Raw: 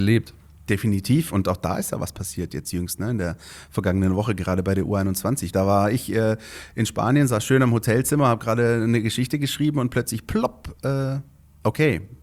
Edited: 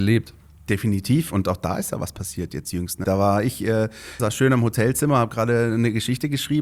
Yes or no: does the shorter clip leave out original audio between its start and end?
yes